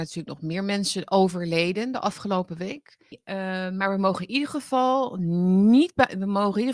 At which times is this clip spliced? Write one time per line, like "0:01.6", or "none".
0:03.1